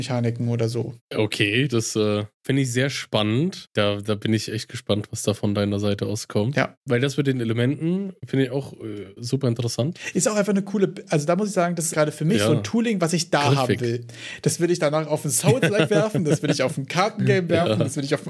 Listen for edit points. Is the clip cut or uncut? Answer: cut